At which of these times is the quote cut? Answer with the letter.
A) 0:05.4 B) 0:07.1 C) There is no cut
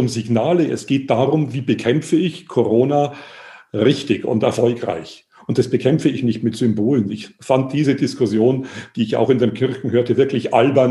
C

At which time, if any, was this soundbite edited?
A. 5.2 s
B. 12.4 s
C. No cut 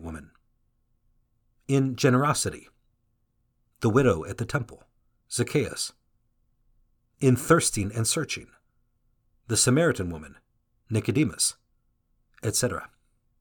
A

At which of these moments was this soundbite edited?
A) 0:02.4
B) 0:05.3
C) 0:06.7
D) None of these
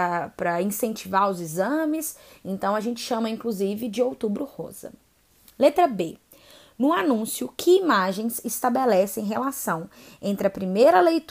D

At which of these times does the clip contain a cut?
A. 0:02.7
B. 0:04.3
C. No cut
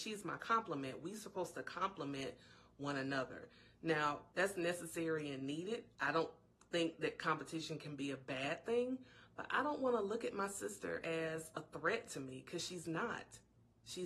B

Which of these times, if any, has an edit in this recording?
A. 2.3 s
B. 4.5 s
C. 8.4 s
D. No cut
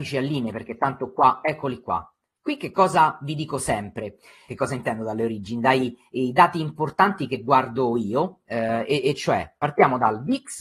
B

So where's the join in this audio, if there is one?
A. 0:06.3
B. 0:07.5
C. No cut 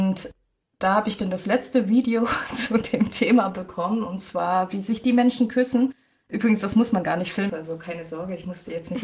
B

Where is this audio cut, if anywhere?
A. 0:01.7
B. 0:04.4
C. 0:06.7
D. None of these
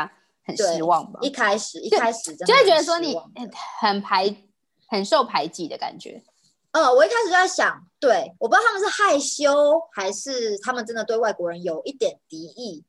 D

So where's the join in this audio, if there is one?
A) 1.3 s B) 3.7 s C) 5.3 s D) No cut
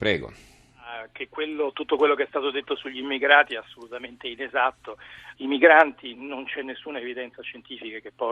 C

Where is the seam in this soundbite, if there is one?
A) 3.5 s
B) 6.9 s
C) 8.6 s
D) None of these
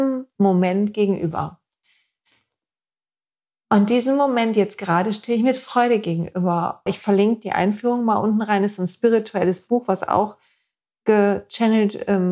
B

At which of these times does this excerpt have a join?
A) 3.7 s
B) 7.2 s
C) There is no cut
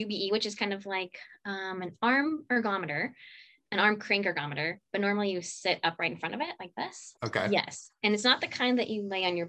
B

